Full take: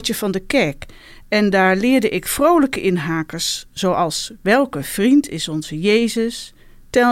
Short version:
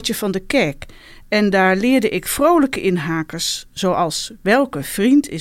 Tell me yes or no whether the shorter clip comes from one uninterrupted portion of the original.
yes